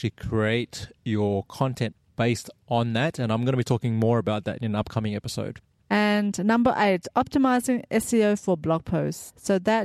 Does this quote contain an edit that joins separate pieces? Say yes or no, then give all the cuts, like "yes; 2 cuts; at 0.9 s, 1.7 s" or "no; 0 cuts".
no; 0 cuts